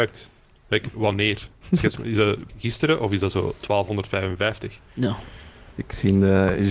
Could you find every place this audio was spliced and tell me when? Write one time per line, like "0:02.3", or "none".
0:02.5